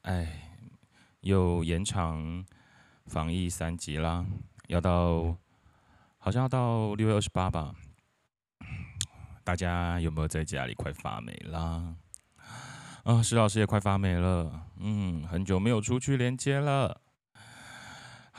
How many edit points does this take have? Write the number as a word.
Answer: zero